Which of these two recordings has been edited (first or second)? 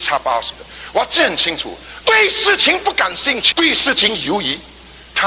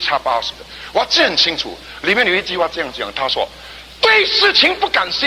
first